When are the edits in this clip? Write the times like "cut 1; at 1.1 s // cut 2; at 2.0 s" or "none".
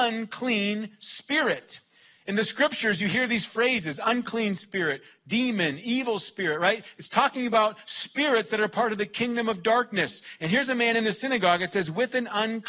none